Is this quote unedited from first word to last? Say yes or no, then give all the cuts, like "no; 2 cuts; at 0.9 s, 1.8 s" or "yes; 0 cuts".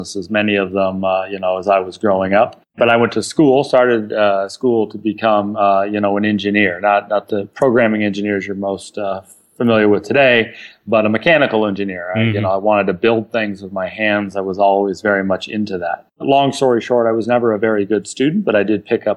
yes; 0 cuts